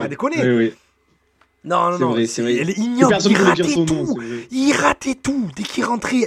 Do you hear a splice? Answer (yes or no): no